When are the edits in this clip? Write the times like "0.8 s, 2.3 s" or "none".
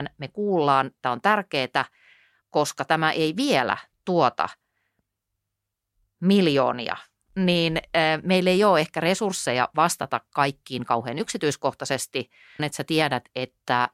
2.4 s, 12.6 s